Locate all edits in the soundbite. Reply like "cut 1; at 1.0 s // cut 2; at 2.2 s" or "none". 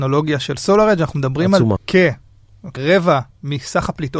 cut 1; at 1.8 s // cut 2; at 2.8 s